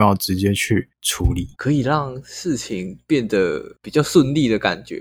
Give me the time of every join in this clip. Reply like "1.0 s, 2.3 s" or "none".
1.5 s, 3.7 s